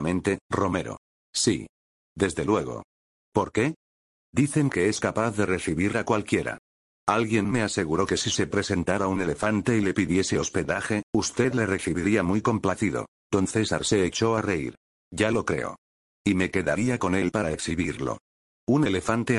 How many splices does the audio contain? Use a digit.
1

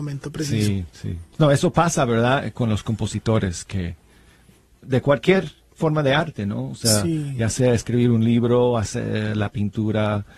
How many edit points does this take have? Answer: 1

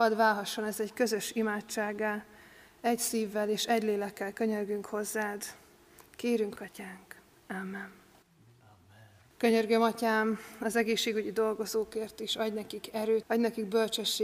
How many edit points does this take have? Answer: 3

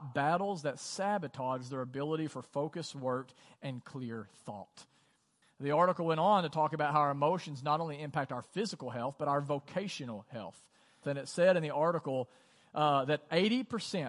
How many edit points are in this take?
2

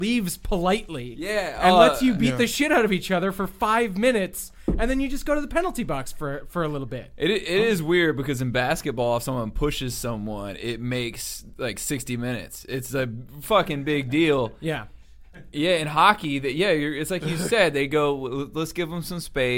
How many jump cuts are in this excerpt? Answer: 0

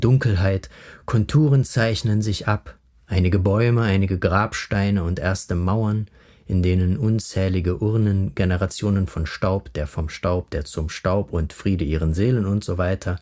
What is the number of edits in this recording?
0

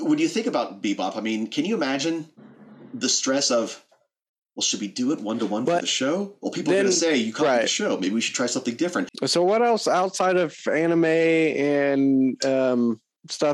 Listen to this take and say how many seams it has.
0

